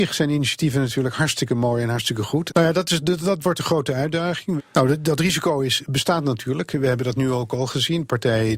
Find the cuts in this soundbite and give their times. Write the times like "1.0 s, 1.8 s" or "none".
2.5 s, 4.6 s